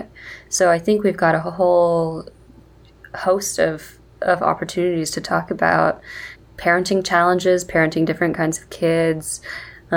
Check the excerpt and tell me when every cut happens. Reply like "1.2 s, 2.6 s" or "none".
none